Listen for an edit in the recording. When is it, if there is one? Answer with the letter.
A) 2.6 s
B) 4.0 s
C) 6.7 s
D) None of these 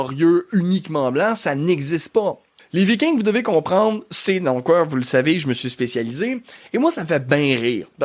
A